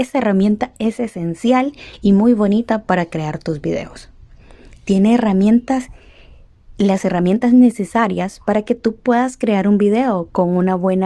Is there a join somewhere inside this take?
no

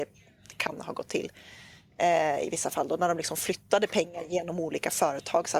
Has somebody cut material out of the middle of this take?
no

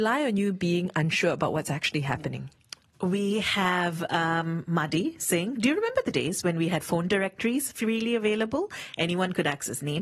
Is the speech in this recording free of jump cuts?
yes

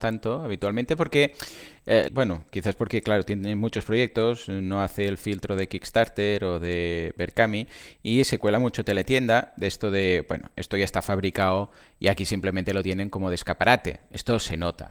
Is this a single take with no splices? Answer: no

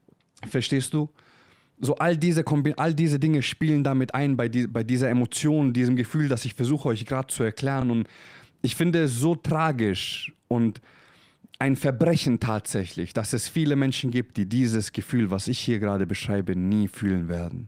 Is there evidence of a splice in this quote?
no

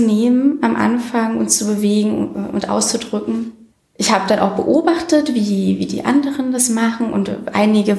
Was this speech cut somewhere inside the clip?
no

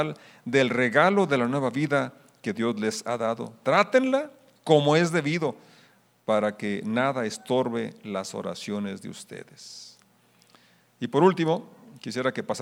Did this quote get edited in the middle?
no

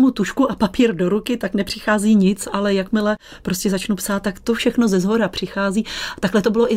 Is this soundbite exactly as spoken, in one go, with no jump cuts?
yes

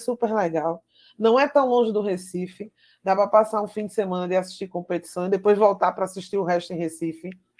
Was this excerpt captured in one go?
yes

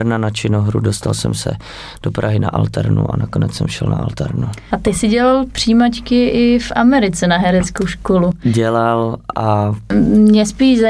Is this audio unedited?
yes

